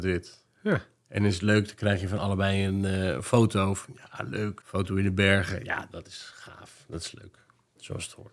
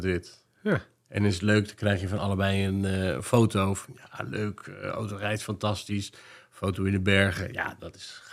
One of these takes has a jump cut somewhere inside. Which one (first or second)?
first